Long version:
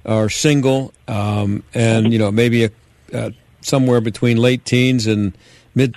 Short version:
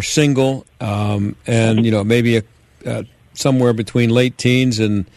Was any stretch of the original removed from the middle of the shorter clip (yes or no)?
no